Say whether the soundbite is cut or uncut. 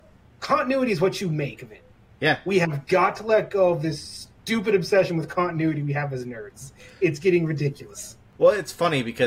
uncut